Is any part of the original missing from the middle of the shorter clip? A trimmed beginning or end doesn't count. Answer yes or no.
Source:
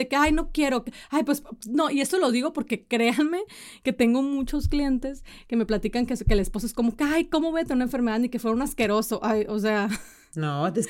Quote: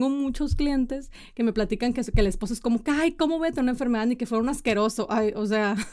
no